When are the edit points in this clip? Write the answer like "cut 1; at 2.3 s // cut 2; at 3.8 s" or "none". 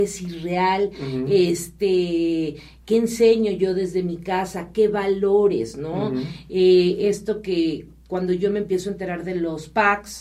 none